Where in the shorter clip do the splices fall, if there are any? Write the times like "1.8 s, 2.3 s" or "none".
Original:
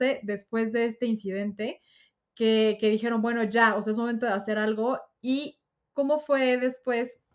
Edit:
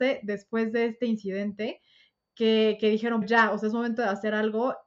3.2 s

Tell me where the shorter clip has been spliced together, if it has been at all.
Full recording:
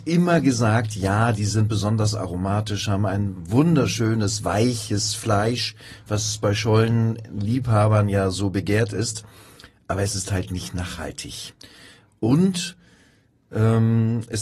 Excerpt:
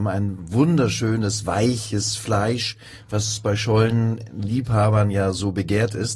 none

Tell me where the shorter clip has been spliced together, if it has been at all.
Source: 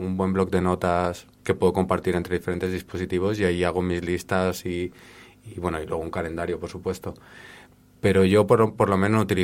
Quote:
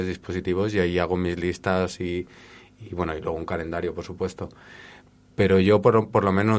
none

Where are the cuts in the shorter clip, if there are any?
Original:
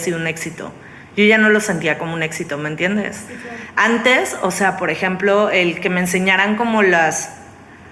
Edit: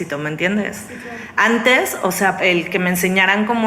2.4 s

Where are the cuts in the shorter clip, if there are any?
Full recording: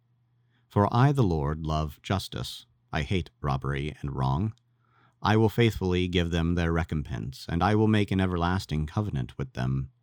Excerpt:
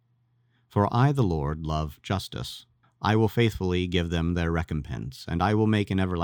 2.8 s

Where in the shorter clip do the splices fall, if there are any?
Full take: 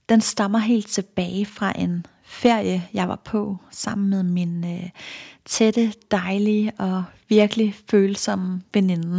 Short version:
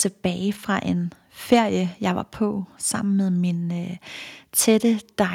none

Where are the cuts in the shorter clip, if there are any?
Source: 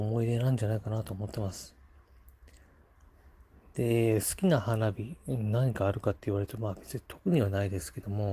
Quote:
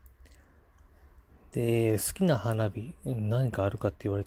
none

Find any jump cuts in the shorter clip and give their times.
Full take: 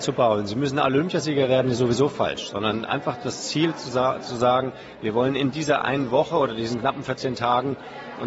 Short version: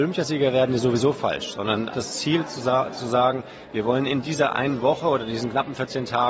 1.9 s

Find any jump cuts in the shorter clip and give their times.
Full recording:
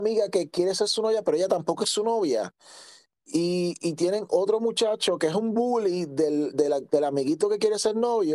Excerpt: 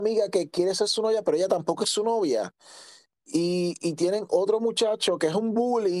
none

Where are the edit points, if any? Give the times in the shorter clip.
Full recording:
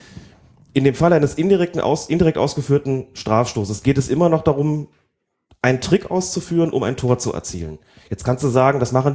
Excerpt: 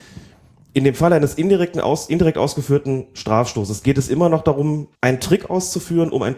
4.9 s

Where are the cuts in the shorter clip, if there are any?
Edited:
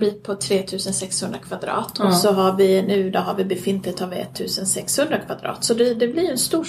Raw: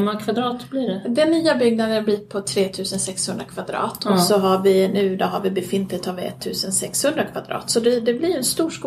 none

